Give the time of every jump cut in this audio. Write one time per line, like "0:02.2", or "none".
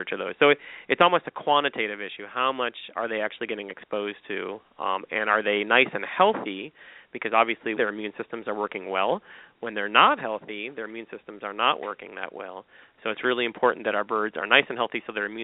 0:07.8